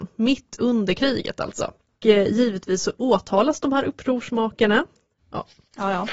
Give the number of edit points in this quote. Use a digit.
1